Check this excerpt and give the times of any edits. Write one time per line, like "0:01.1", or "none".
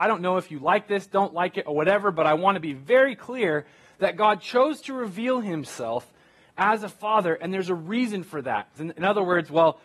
0:08.8